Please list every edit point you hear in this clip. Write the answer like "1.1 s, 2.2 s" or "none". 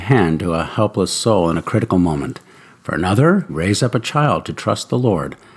3.5 s